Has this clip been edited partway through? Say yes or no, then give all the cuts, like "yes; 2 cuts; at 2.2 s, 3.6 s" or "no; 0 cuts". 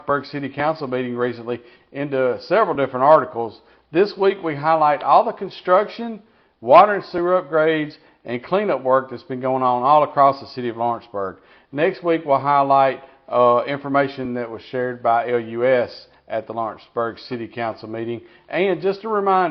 no; 0 cuts